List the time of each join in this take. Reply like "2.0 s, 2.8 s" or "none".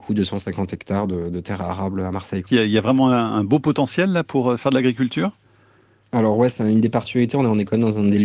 2.4 s